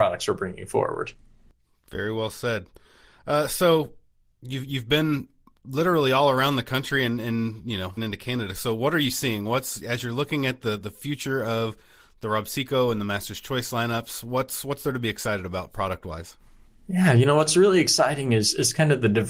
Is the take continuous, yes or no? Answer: no